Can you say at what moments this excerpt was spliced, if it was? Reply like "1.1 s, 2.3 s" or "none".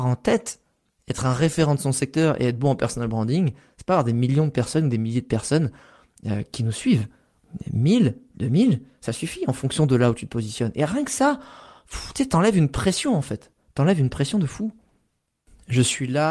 none